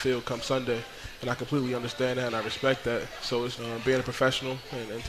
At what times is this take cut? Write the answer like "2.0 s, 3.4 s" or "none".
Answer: 2.3 s, 3.6 s